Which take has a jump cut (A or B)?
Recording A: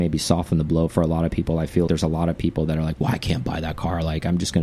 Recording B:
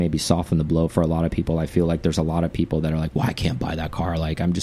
A